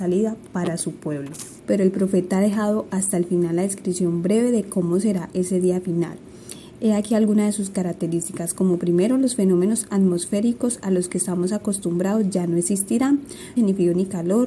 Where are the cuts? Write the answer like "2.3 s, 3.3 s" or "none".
1.6 s, 13.6 s